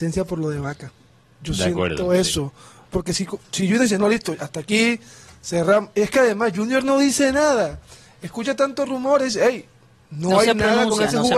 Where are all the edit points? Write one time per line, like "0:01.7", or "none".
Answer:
none